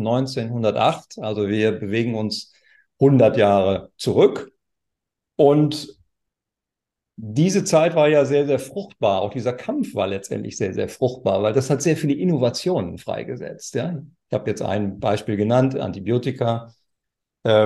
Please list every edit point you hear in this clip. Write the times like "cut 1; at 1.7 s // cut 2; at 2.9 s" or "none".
none